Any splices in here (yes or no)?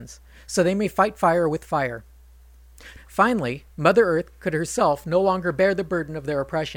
yes